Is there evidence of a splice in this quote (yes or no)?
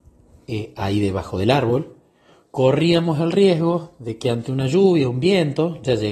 no